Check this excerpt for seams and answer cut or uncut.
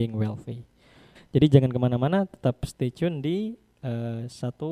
cut